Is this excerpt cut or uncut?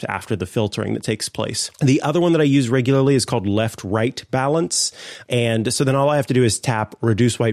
cut